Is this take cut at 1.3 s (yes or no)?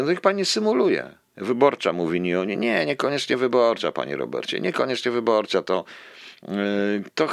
yes